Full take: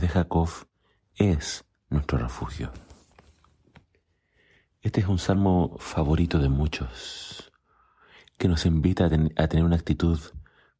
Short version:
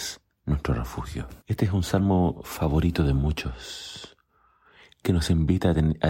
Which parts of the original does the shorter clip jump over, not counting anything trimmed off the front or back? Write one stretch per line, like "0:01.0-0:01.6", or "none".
0:02.8-0:04.8